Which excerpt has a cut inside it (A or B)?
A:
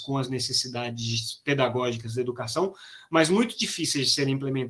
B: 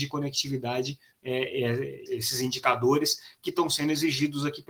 B